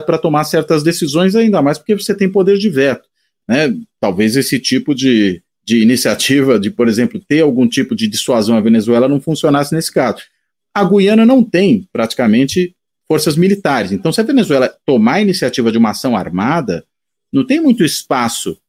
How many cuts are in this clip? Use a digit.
1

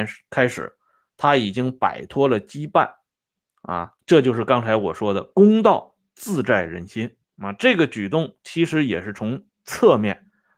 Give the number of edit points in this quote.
2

